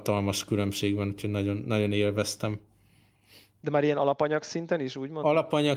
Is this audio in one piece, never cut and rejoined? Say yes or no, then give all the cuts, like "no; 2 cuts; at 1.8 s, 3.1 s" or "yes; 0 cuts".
yes; 0 cuts